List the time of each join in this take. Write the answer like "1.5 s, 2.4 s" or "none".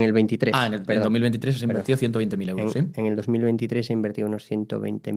none